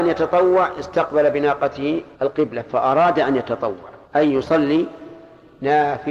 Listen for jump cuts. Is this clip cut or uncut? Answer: cut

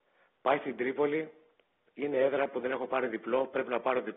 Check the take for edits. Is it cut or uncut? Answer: uncut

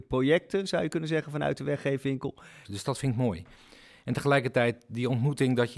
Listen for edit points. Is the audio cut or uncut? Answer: cut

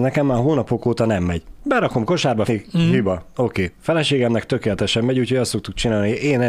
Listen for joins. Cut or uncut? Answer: cut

